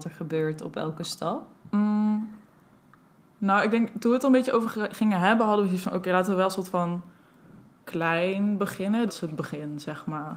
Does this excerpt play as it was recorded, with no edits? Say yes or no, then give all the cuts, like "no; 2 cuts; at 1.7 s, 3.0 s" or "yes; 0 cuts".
no; 2 cuts; at 7.8 s, 9.1 s